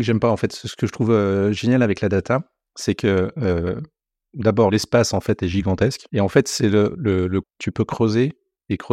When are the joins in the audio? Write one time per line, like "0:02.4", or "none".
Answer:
0:06.1
0:07.4